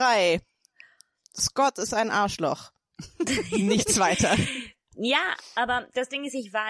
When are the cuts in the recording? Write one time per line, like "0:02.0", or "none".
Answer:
none